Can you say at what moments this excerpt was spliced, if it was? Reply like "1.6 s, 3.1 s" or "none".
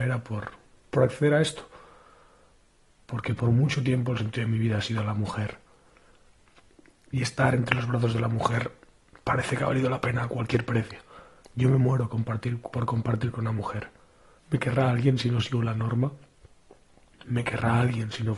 11.4 s, 14.4 s

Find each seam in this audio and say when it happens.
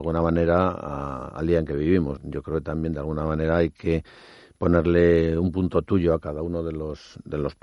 2.2 s

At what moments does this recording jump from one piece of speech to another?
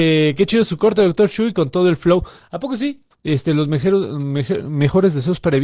3.1 s

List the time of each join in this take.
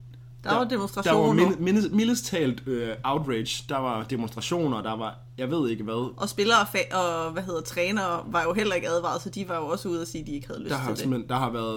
none

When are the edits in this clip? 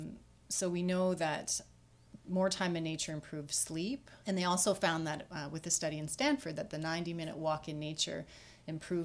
4.2 s

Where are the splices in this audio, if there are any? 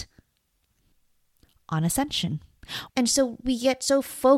2.9 s

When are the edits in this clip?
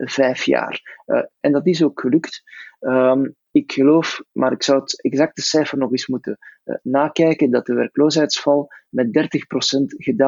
1.4 s

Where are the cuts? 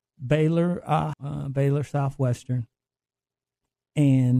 1.1 s

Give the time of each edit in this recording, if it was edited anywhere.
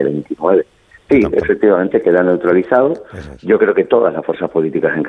1.1 s

